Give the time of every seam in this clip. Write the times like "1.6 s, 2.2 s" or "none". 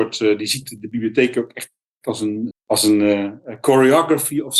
2.5 s